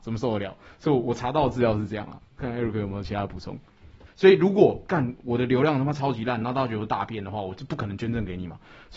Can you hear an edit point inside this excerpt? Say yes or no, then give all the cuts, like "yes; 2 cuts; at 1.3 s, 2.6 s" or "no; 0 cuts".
yes; 1 cut; at 4.1 s